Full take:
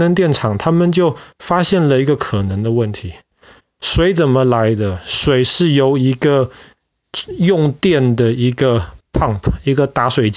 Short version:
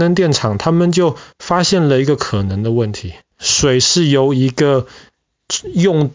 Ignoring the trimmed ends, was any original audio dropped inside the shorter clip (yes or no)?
yes